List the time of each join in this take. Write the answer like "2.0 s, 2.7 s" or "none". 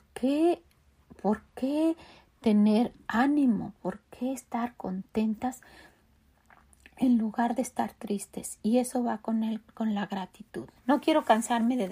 10.8 s